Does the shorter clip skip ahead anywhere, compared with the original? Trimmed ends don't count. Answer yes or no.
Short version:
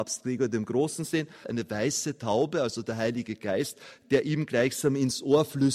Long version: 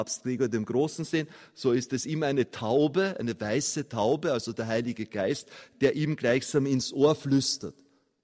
yes